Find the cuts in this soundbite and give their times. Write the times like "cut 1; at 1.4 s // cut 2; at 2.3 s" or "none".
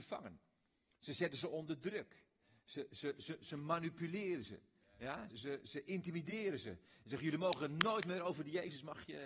cut 1; at 5.3 s